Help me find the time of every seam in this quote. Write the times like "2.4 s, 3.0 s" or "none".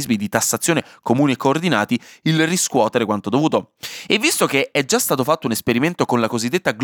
none